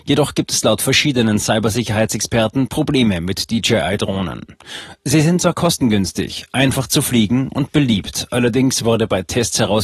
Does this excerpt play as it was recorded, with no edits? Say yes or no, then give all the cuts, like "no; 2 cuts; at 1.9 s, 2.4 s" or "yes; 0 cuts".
yes; 0 cuts